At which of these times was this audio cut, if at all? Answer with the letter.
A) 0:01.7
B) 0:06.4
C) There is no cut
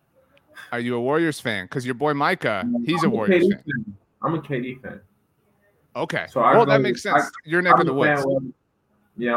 C